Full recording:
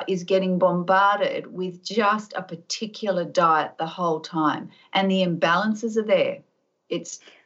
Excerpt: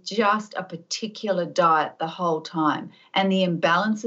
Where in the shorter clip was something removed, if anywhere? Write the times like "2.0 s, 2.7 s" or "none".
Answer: none